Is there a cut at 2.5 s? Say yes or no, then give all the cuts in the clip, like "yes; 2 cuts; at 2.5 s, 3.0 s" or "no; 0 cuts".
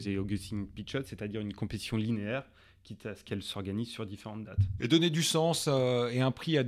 no; 1 cut; at 4.8 s